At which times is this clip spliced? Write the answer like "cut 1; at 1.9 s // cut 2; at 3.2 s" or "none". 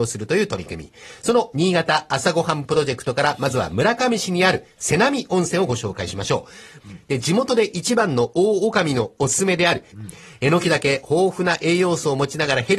cut 1; at 6.8 s // cut 2; at 9.9 s